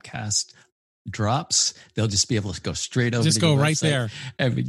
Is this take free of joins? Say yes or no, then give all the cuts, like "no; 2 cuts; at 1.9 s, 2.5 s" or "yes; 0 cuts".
yes; 0 cuts